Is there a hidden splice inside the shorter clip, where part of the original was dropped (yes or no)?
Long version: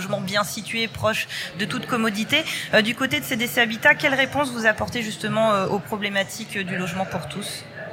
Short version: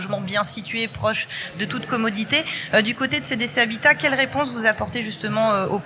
no